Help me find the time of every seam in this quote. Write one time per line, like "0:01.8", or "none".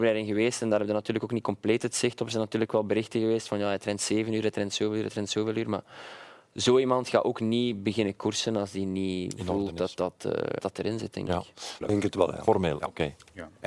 0:10.6
0:11.8